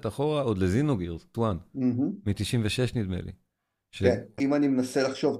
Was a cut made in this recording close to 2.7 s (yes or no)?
no